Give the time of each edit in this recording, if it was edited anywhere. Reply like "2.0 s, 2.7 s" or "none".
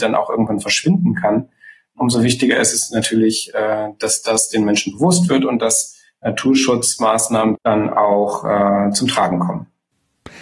7.5 s